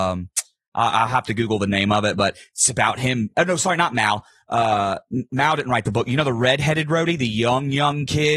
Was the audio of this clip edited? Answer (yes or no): no